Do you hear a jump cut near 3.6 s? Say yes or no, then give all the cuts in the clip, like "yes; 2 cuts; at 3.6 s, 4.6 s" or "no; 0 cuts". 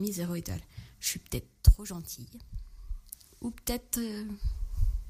no; 1 cut; at 0.9 s